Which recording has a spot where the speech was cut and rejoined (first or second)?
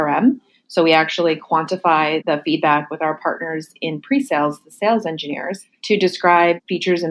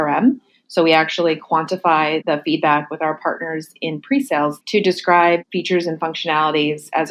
second